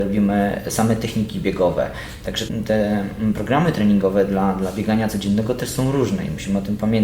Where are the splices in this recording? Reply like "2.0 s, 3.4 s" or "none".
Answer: none